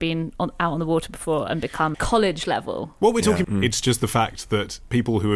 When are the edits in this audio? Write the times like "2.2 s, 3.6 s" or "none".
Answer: 1.9 s, 3.4 s